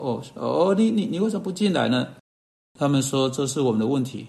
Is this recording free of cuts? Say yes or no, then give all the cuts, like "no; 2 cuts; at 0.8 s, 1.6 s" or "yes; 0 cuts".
yes; 0 cuts